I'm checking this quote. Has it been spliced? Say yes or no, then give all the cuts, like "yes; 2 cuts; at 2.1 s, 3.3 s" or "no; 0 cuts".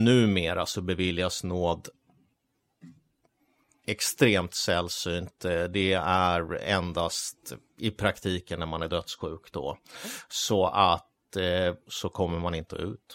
yes; 1 cut; at 11.9 s